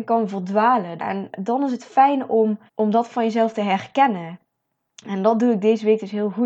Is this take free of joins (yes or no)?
no